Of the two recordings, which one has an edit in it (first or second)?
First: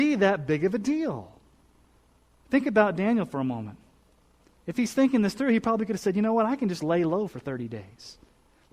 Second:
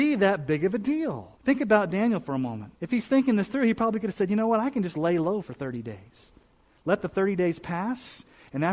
second